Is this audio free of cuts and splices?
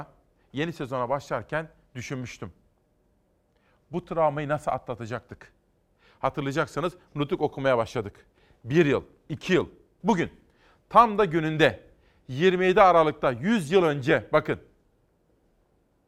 no; 1 cut; at 10.0 s

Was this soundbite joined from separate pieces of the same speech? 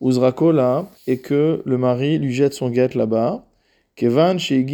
yes; 1 cut; at 0.9 s

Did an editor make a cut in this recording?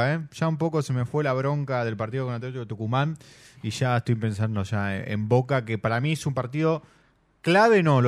no; 0 cuts

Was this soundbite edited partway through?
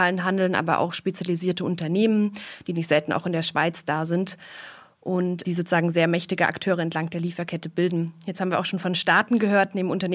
yes; 1 cut; at 5.4 s

